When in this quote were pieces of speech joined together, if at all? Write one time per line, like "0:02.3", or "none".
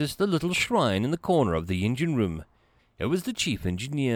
0:02.8